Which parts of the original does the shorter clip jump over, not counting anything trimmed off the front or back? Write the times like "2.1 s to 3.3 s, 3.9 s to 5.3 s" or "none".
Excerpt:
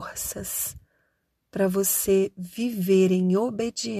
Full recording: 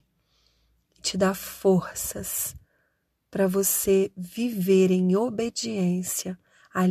none